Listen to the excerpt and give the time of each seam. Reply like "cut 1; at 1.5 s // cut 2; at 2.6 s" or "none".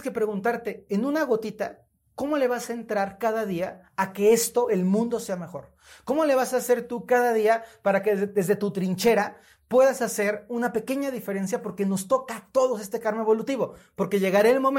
none